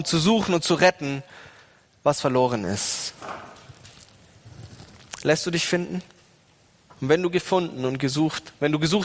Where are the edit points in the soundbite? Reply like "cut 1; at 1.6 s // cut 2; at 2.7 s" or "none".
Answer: cut 1; at 6.9 s